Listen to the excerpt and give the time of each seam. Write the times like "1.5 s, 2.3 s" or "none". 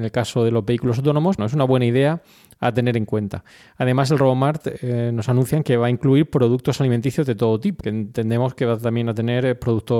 1.4 s, 7.8 s